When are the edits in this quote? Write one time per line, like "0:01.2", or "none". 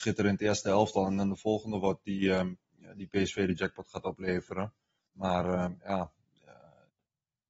none